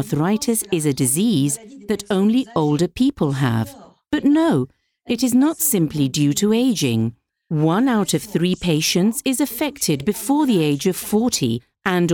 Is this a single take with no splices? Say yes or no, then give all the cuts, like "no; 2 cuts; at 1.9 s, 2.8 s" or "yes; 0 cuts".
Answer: yes; 0 cuts